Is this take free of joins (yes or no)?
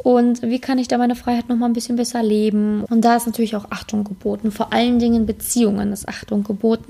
no